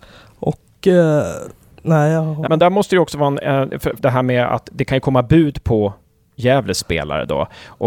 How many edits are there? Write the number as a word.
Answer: two